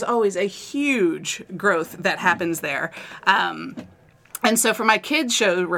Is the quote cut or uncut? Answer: uncut